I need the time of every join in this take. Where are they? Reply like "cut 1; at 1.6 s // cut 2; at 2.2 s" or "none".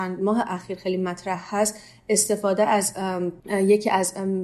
cut 1; at 3.4 s